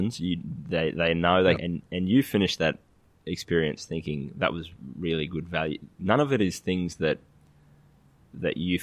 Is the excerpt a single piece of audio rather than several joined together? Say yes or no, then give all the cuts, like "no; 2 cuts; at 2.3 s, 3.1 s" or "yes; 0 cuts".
no; 1 cut; at 1.6 s